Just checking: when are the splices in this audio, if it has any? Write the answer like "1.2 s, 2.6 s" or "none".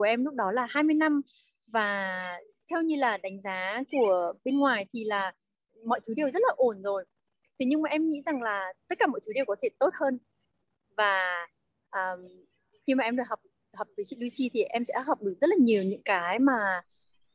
none